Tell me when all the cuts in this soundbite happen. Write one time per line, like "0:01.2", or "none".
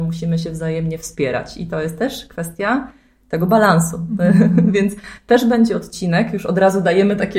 none